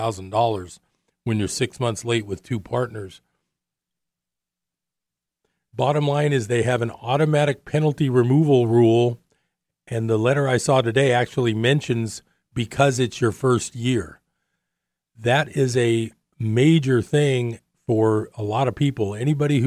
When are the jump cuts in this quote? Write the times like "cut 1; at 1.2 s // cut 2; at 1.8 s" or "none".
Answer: none